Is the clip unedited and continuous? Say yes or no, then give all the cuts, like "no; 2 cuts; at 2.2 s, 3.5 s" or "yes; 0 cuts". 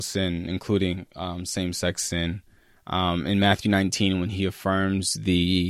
yes; 0 cuts